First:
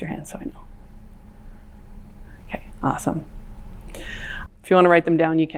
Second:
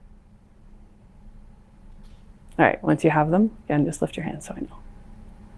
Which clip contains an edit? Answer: first; 1 cut; at 4.5 s

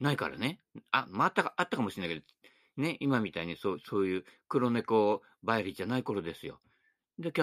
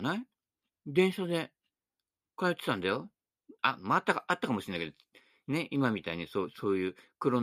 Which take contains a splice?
second; 1 cut; at 3.6 s

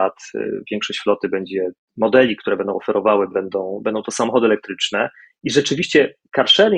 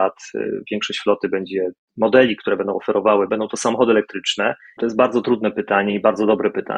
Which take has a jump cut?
second; 2 cuts; at 3.3 s, 4.8 s

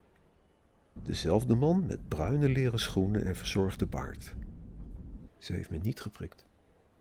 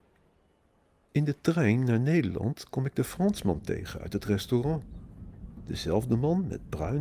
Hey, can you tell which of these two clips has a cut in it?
first; 2 cuts; at 1.0 s, 5.3 s

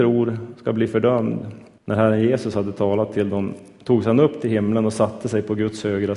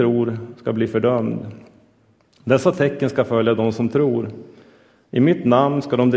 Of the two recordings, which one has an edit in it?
first; 1 cut; at 1.8 s

